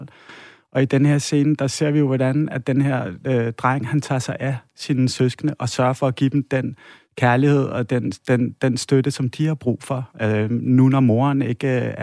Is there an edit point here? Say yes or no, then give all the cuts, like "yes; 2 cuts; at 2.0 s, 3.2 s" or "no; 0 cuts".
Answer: no; 0 cuts